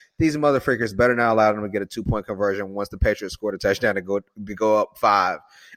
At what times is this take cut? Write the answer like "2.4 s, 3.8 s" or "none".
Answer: none